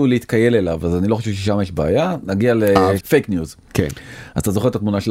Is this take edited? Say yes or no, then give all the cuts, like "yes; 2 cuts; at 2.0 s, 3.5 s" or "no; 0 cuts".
yes; 1 cut; at 3.0 s